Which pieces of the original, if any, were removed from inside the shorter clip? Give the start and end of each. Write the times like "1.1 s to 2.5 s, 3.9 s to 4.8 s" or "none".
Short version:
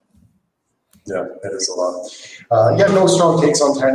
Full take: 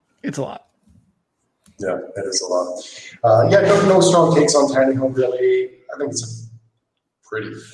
3.6 s to 3.8 s